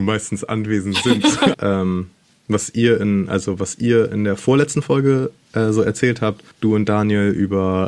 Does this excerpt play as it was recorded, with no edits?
no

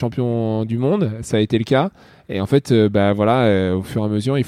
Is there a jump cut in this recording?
no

